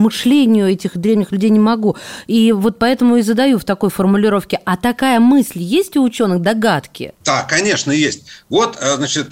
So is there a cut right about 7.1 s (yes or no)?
yes